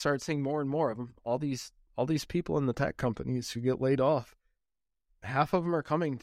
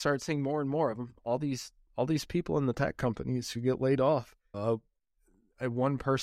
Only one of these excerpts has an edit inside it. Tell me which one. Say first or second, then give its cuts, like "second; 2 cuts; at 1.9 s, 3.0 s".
second; 1 cut; at 4.5 s